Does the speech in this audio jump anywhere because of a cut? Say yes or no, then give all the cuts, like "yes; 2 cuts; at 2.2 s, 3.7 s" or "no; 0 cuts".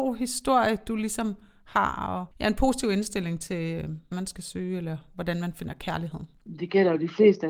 yes; 2 cuts; at 2.3 s, 4.1 s